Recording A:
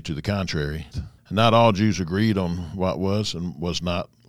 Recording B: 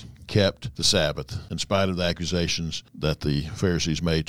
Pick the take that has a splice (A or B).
A